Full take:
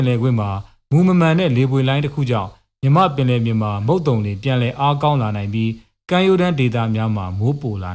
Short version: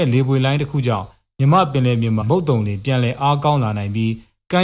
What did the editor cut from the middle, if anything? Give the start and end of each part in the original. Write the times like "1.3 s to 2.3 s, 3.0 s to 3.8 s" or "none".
3.6 s to 3.8 s